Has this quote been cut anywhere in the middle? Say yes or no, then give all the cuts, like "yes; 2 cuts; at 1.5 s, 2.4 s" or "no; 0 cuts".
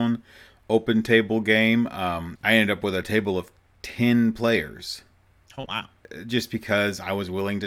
yes; 1 cut; at 2.4 s